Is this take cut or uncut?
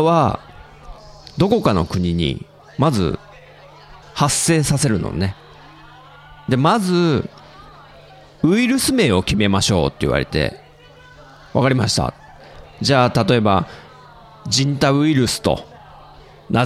cut